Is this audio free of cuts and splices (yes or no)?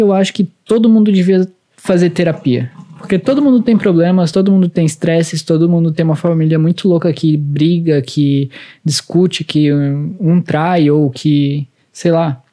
yes